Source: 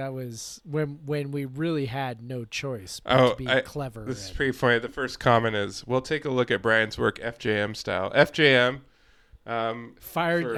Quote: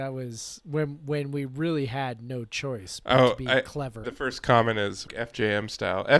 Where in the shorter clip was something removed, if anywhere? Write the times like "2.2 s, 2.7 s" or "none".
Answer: 4.0 s, 5.1 s